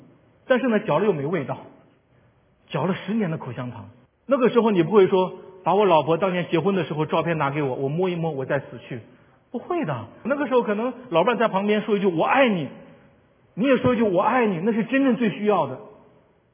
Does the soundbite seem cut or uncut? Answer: cut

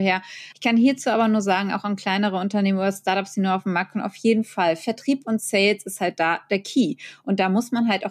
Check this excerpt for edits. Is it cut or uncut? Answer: uncut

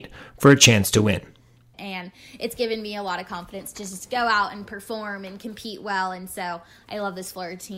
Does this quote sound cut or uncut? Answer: cut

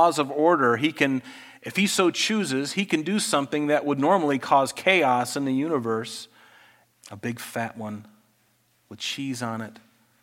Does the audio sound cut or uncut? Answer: cut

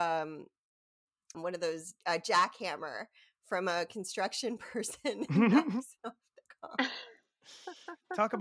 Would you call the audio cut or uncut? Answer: cut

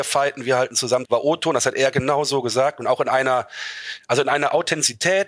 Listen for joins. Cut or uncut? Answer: cut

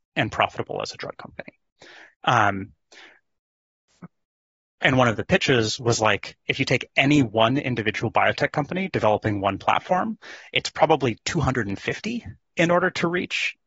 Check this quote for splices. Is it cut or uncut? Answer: cut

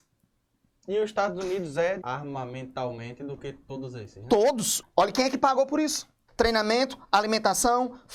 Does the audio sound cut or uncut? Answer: cut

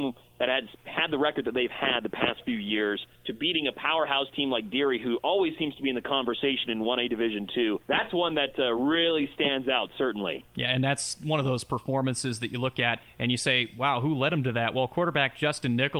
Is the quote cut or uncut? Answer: uncut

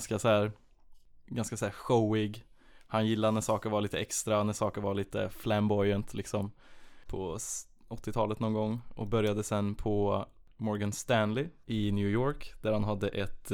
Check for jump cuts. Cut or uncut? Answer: cut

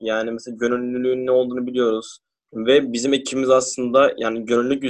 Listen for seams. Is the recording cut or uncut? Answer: cut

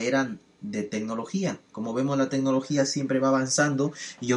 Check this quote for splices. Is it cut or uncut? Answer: uncut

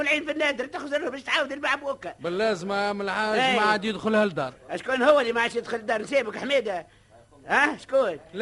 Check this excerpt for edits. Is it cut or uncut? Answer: uncut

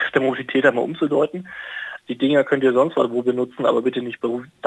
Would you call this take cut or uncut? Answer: cut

